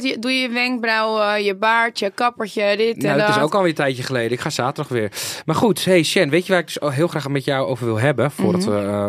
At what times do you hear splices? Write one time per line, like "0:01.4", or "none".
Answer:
none